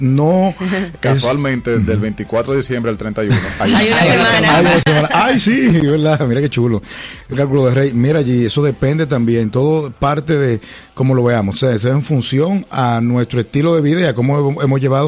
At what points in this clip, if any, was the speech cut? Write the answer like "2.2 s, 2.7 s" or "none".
0.9 s, 7.3 s